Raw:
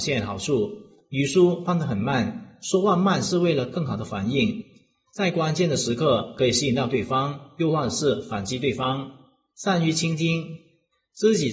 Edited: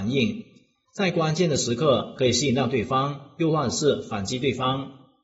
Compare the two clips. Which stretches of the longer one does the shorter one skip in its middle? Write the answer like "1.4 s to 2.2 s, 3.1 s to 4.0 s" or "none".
none